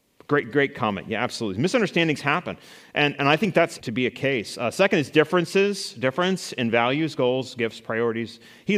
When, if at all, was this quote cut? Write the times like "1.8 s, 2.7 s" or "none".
3.8 s